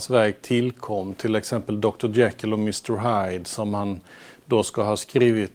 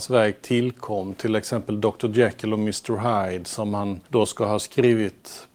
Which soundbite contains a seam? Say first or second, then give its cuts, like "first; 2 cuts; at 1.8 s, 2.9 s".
second; 1 cut; at 4.0 s